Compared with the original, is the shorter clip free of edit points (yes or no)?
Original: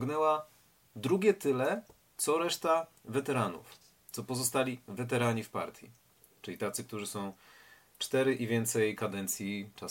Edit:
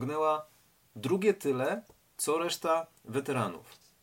yes